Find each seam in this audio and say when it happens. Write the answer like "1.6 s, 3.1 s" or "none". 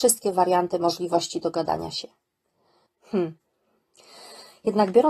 2.9 s